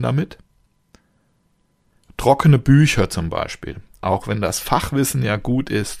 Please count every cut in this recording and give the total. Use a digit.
1